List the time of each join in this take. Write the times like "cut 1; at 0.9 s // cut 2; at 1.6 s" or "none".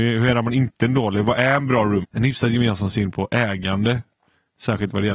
cut 1; at 2.0 s